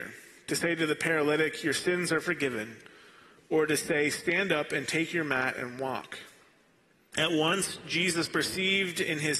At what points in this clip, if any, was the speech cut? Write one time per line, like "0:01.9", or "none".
0:07.1